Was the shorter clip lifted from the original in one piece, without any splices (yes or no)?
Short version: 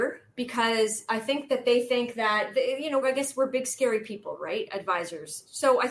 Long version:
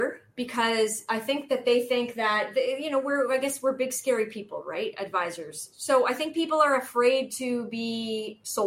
no